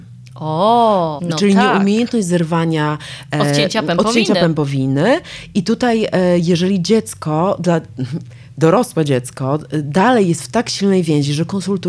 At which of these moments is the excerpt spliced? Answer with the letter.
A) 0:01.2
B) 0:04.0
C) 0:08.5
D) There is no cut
A